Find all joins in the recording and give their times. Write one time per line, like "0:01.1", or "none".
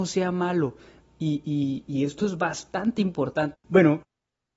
0:01.0
0:03.5